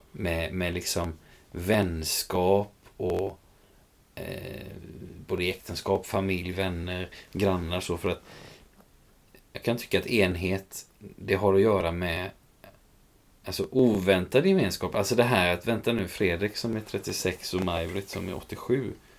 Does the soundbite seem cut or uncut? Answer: uncut